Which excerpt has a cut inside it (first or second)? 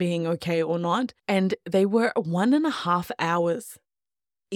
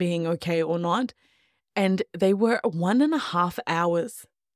first